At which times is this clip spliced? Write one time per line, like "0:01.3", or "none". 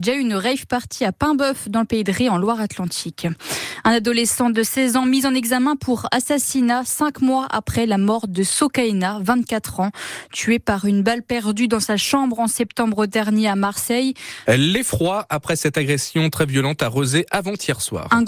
0:14.4